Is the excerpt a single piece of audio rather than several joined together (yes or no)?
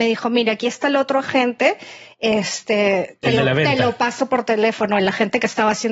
yes